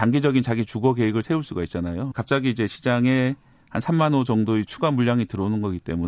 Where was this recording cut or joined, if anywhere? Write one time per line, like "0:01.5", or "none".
0:02.1